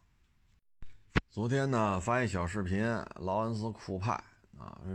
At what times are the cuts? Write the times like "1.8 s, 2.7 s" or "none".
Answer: none